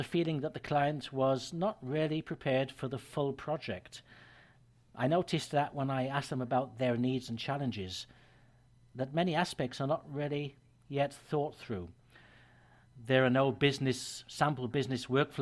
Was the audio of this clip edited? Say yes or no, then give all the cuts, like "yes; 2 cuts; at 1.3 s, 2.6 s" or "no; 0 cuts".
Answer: no; 0 cuts